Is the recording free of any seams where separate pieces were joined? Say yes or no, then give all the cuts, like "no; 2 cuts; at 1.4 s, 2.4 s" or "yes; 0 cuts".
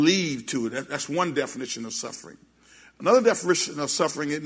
yes; 0 cuts